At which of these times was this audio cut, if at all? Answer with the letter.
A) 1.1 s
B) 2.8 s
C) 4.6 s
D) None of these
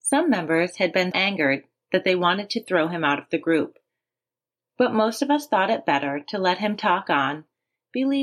A